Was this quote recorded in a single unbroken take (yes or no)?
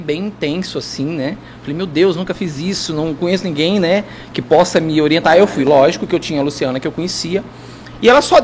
yes